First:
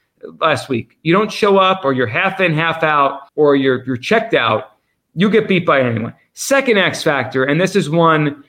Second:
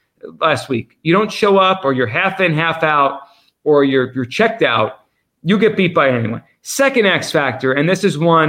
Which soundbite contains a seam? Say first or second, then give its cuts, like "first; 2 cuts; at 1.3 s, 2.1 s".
first; 1 cut; at 3.3 s